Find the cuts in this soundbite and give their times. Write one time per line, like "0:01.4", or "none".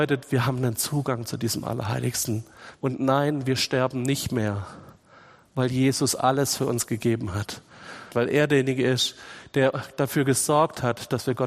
0:02.7
0:08.1

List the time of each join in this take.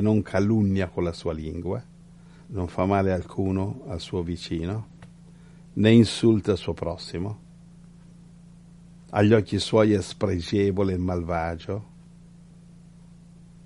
none

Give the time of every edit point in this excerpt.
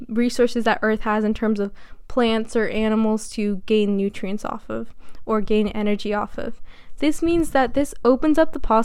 0:07.0

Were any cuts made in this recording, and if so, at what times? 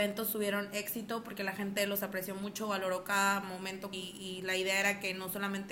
0:03.9

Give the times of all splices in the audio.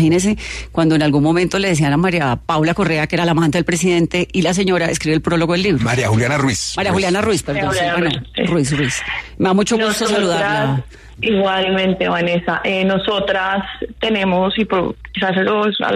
0:11.2

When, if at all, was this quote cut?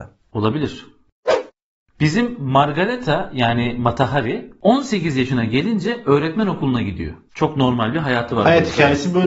none

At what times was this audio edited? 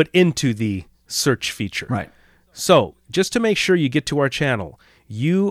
none

